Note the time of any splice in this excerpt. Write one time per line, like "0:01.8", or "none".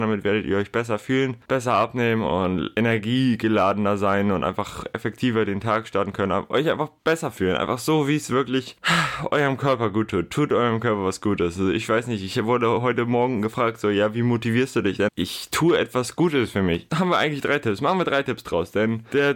0:15.1
0:16.9